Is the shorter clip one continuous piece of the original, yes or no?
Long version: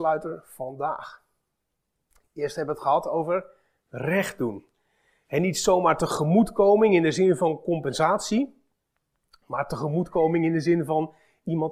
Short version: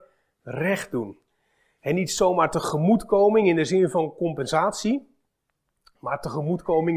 yes